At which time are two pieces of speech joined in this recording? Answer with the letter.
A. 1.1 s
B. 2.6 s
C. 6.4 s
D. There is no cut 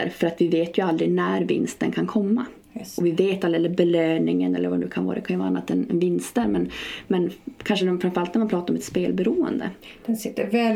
B